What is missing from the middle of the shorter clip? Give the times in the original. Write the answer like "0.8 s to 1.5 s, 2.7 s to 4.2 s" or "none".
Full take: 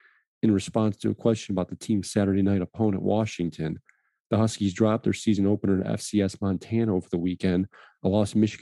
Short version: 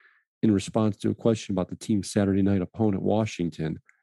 none